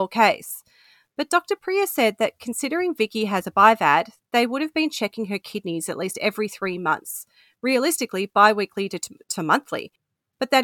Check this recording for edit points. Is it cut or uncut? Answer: uncut